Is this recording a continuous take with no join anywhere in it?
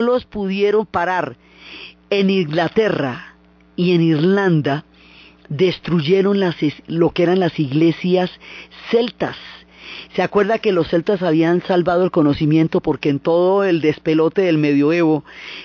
yes; 0 cuts

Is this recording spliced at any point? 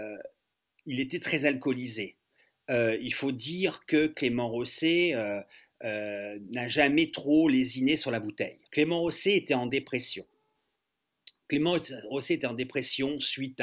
yes; 1 cut; at 8.7 s

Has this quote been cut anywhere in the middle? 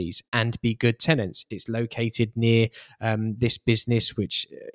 yes; 1 cut; at 1.5 s

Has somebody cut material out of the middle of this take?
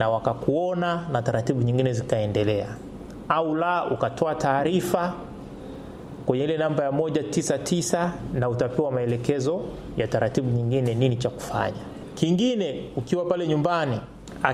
no; 0 cuts

